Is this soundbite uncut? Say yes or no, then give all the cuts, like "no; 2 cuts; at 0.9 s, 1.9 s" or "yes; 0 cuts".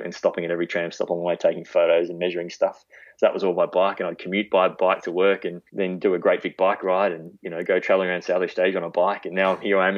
no; 1 cut; at 5.7 s